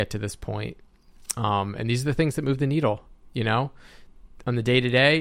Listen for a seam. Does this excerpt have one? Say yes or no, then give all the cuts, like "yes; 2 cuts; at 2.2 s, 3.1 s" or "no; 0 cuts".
no; 0 cuts